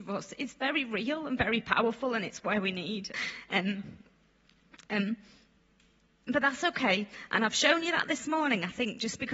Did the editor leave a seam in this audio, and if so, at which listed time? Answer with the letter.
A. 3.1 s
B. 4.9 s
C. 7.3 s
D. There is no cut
A